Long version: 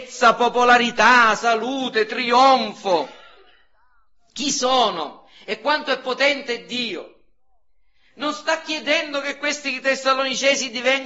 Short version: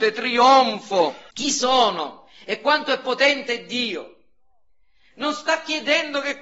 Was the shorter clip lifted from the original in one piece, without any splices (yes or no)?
no